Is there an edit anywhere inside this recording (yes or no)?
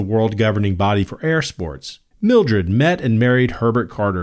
yes